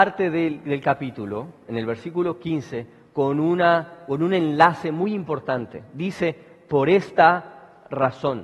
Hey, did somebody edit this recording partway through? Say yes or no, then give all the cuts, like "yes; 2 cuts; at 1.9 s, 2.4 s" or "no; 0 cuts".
no; 0 cuts